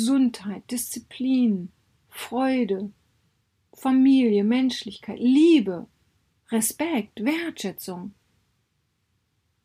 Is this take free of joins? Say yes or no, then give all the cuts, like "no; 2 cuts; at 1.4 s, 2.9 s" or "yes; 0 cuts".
yes; 0 cuts